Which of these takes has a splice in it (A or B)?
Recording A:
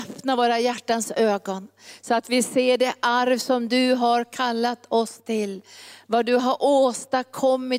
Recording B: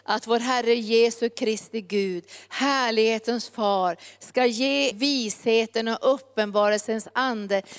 B